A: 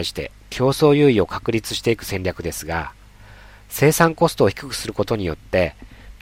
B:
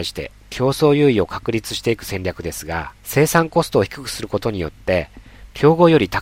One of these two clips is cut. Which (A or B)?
B